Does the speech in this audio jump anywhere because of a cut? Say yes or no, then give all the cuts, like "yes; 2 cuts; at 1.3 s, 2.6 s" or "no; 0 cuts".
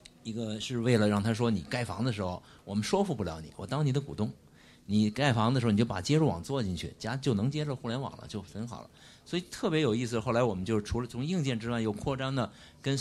no; 0 cuts